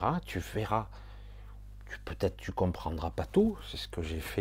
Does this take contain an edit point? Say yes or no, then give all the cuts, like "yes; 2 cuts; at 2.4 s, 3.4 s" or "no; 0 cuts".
no; 0 cuts